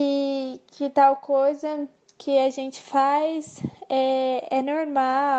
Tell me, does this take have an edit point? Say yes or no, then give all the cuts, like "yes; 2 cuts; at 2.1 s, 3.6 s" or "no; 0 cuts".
no; 0 cuts